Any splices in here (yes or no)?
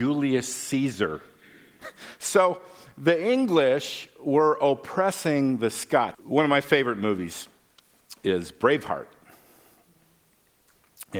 yes